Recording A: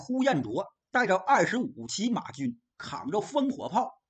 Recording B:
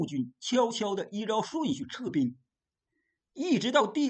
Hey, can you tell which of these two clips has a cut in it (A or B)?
A